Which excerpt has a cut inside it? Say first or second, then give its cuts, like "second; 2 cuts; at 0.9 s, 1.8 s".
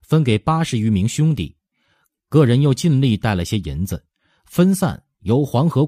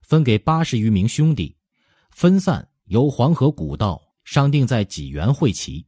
second; 2 cuts; at 2.0 s, 4.1 s